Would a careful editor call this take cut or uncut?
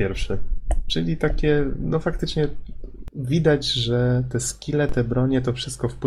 uncut